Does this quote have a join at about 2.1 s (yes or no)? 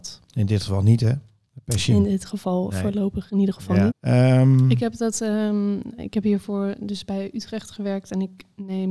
no